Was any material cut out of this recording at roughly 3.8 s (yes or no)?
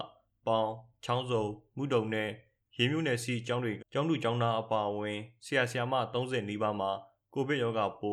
yes